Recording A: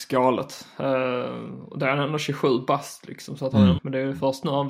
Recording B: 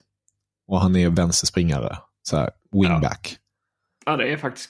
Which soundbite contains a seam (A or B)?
A